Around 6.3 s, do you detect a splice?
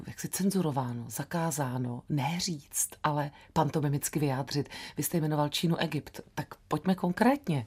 no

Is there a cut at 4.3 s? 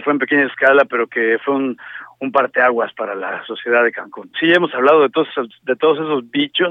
yes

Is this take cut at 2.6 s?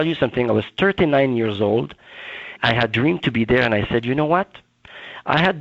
yes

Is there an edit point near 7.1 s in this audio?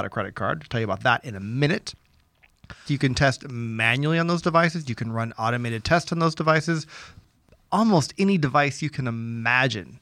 no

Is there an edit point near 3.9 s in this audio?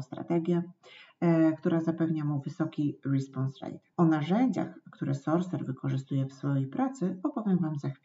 yes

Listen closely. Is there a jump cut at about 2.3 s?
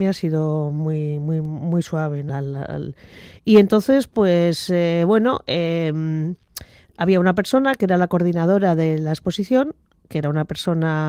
yes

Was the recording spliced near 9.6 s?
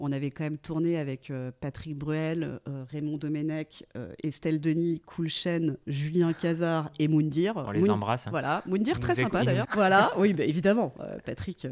yes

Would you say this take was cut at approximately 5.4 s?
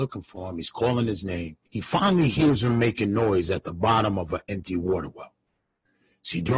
no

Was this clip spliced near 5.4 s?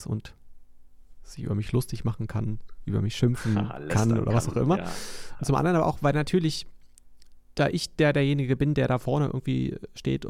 yes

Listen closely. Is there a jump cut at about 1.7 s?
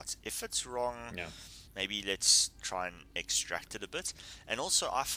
yes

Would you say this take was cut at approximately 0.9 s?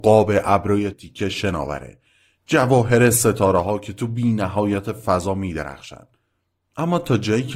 yes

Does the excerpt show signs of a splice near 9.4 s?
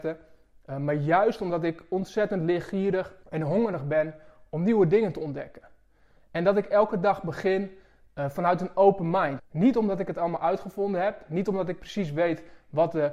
yes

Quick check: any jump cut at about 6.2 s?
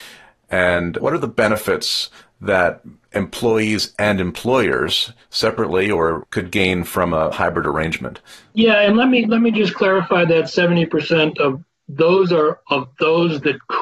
yes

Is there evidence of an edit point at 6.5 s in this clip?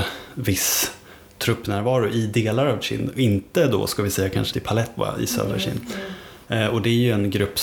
yes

